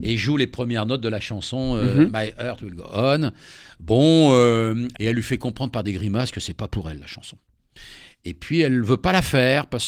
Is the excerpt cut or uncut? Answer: cut